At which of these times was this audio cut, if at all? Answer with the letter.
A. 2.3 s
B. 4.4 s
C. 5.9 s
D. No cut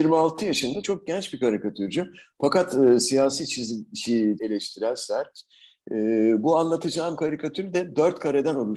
B